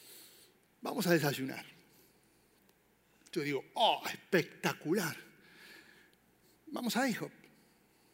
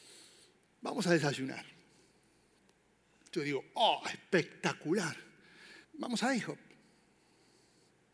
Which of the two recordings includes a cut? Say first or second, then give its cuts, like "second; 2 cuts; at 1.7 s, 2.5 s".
second; 1 cut; at 5.8 s